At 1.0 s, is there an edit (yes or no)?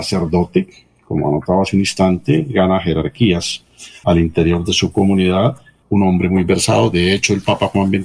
no